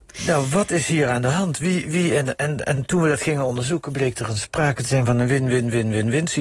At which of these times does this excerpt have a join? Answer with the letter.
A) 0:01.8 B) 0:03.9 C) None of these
A